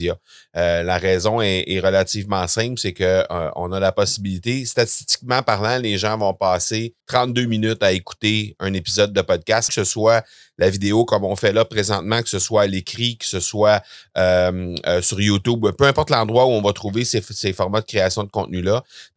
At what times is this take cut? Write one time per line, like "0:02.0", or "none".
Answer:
0:07.0
0:09.7